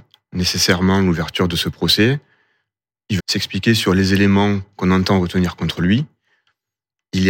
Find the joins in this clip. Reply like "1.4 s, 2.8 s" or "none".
3.2 s